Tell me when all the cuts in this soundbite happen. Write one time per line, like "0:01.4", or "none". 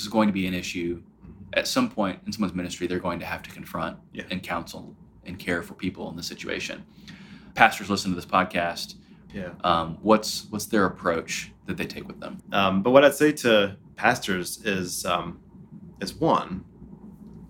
0:09.3
0:12.4